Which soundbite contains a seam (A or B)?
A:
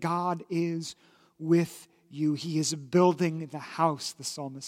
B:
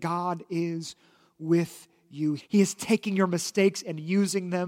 B